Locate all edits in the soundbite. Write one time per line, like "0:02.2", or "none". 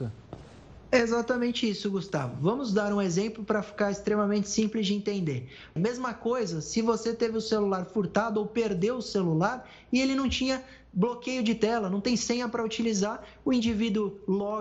0:05.8